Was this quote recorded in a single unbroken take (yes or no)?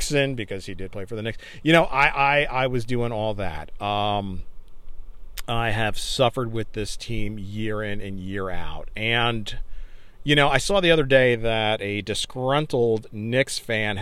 yes